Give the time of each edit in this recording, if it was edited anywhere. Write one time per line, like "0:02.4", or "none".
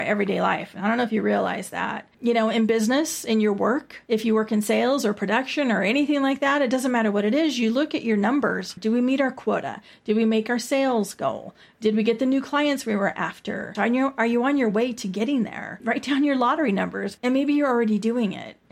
0:08.8
0:13.7
0:17.2